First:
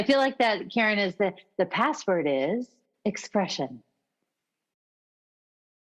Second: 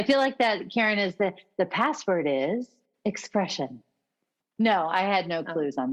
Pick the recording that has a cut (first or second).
second